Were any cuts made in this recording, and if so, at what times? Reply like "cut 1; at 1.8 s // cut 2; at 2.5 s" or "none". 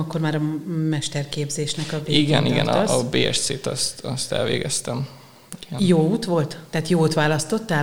none